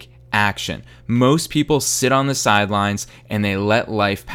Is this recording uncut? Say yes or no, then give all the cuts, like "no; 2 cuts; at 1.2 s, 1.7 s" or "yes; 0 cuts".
yes; 0 cuts